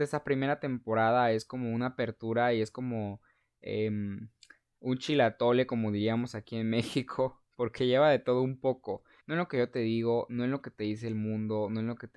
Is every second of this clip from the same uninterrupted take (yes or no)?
no